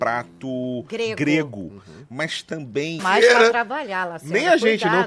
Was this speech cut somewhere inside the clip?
yes; 1 cut; at 3.0 s

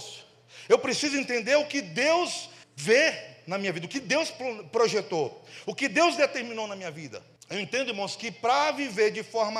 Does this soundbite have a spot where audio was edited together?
yes; 2 cuts; at 2.6 s, 7.4 s

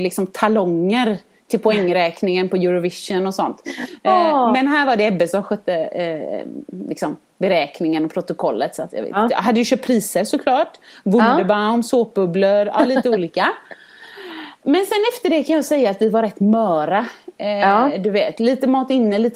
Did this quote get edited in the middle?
no; 0 cuts

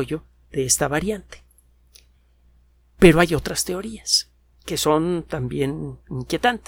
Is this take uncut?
yes; 0 cuts

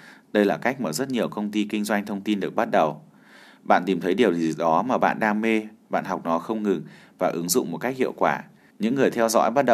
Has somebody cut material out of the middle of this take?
yes; 1 cut; at 8.7 s

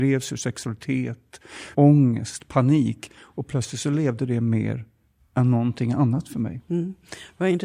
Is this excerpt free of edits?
no; 1 cut; at 1.7 s

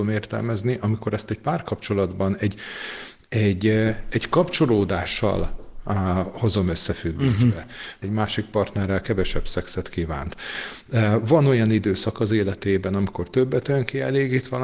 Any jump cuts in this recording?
yes; 1 cut; at 8.0 s

